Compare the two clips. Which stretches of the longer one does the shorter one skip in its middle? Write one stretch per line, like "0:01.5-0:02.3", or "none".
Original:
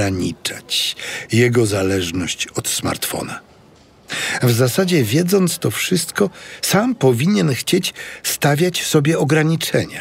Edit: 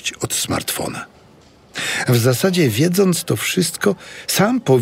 none